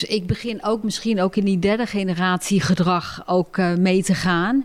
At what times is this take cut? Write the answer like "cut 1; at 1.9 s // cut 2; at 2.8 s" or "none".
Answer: none